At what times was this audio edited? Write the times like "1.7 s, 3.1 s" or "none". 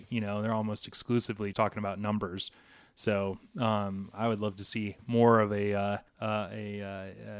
1.5 s, 6.1 s